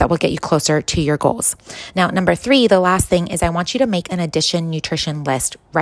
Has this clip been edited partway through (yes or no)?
no